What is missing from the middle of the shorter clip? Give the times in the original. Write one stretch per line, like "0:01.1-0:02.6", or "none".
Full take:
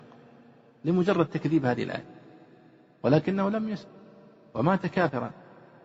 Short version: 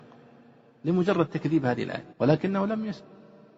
0:02.1-0:03.0